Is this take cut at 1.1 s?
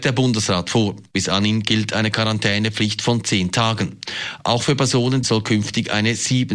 no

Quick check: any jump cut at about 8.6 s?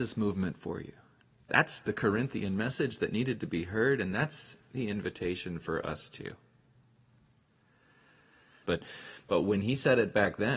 yes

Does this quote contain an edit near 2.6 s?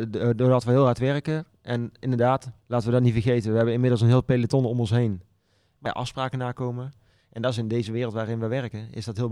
yes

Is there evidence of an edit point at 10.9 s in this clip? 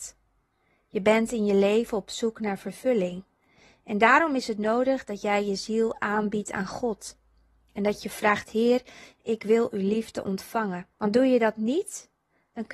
yes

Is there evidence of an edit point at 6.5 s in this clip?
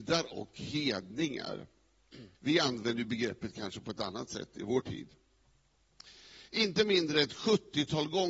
no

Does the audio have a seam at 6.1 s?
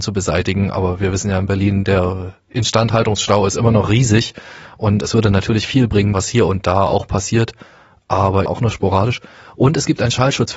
yes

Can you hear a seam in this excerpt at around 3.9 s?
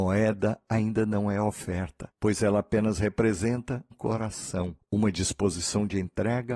yes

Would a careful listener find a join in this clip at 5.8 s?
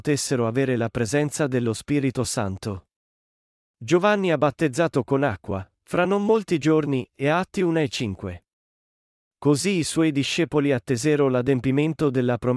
yes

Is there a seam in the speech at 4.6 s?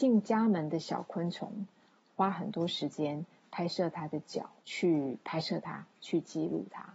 yes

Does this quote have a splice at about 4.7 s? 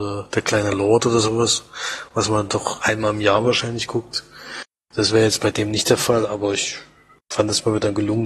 no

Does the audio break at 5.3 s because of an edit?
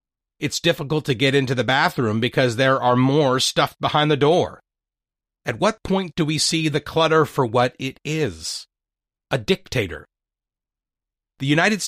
yes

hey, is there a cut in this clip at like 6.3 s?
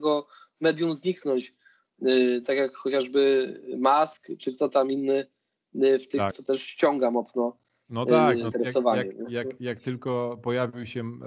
yes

